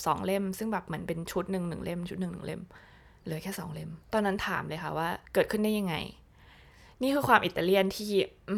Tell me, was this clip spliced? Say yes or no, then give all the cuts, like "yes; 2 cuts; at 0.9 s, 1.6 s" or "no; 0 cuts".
yes; 2 cuts; at 4.0 s, 5.2 s